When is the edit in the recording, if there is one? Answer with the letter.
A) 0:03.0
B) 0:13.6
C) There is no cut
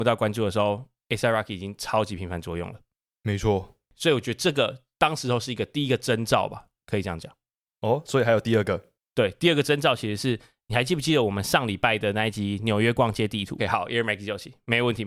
B